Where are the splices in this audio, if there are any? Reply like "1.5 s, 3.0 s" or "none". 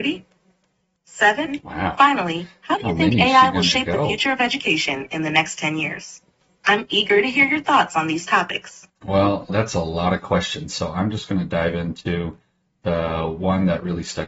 9.5 s